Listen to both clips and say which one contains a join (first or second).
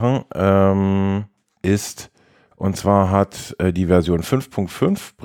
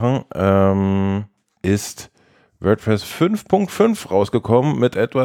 first